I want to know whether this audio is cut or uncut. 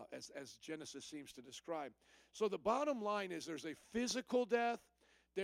uncut